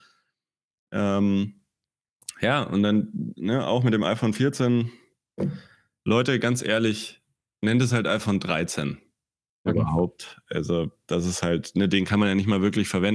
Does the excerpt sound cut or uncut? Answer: cut